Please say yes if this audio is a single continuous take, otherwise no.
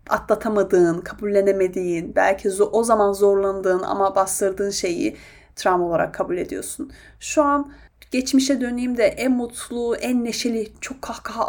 yes